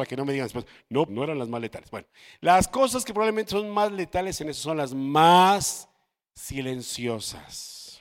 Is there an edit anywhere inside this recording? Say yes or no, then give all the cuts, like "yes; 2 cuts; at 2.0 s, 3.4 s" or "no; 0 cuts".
yes; 1 cut; at 1.1 s